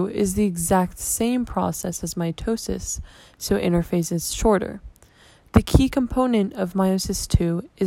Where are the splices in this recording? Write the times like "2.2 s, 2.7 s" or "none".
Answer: 3.3 s

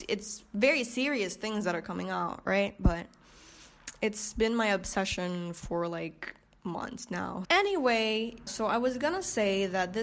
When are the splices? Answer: 7.4 s, 8.5 s

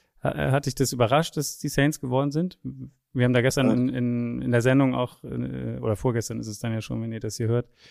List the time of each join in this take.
none

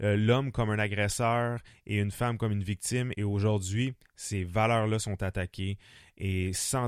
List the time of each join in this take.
3.1 s

